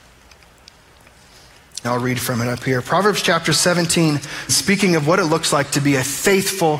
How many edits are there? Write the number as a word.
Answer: two